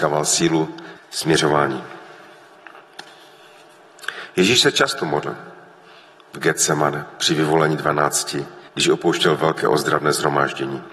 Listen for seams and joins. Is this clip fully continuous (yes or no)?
no